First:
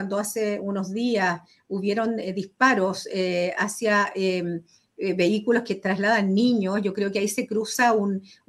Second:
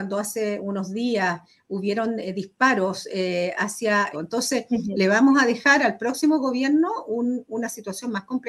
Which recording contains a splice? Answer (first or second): second